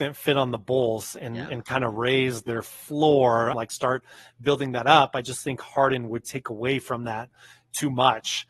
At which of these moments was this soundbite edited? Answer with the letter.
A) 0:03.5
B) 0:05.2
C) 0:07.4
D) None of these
A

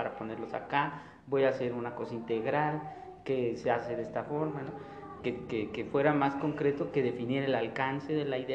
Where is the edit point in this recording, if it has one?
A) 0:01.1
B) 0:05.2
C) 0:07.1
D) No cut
B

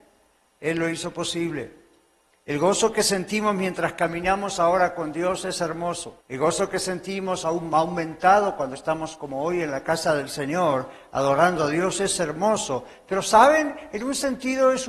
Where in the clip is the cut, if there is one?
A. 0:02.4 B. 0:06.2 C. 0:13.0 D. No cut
B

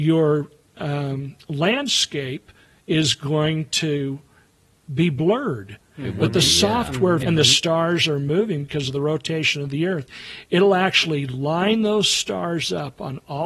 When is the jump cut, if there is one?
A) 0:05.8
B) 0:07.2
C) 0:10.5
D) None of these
B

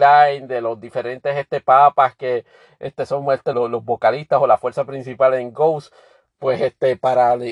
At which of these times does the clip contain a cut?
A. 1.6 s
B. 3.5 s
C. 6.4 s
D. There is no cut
B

